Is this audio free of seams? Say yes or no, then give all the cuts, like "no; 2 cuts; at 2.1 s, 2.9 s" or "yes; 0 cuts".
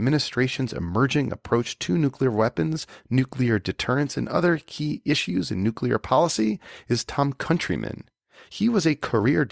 yes; 0 cuts